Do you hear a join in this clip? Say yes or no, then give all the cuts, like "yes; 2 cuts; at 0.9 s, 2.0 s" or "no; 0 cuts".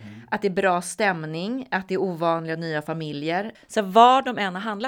yes; 1 cut; at 3.5 s